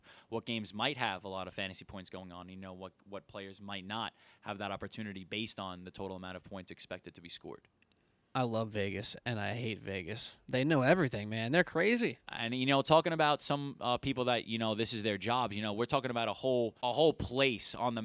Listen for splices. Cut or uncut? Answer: cut